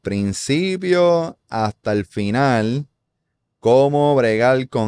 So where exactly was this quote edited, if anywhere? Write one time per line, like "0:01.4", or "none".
none